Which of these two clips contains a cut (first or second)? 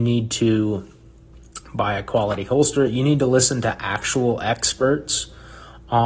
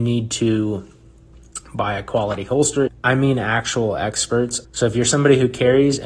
second